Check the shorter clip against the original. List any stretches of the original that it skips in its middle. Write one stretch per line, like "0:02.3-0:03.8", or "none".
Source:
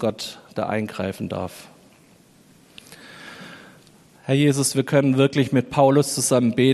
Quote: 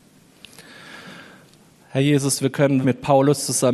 0:05.1-0:05.5